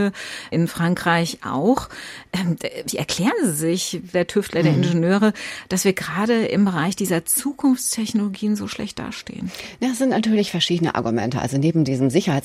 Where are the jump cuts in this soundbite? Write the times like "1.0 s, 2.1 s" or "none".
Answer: 4.1 s

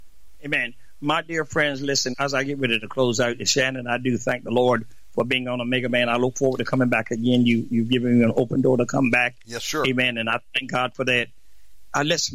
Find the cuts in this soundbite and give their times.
2.1 s

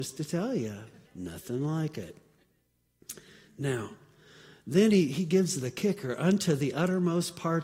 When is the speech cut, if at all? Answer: 1.1 s

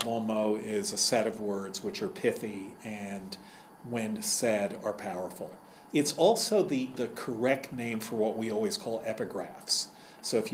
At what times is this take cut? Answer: 5.9 s, 6.9 s

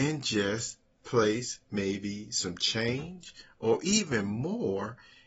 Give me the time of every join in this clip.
none

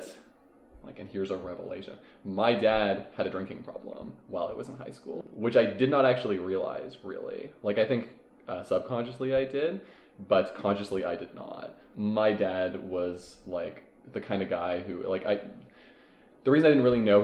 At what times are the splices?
11.9 s

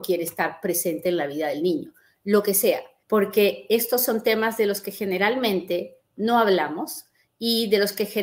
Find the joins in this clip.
3.0 s

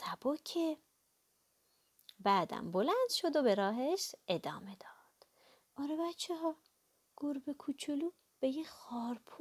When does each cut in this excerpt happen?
5.6 s

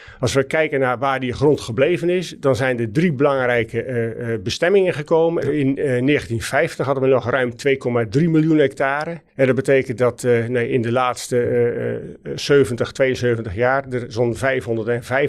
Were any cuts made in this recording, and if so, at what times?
5.4 s, 9.3 s

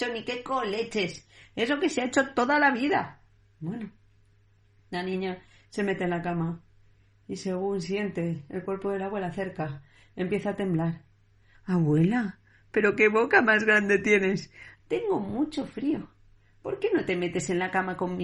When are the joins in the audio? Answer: 11.5 s, 14.8 s

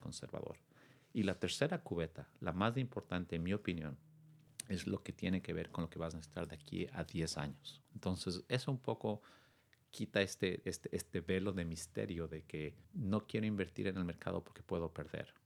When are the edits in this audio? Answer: 7.8 s, 10.6 s, 12.8 s

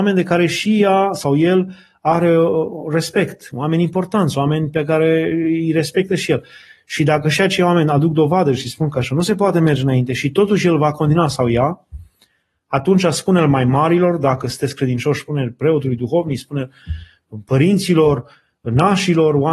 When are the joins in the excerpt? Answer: none

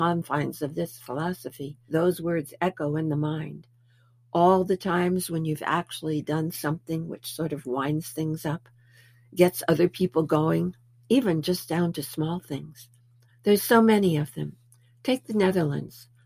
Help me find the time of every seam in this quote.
1.9 s, 13.3 s

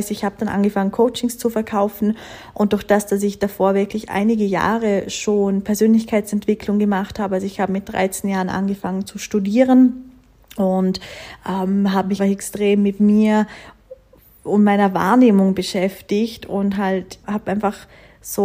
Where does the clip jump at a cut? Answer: 12.2 s, 17.2 s

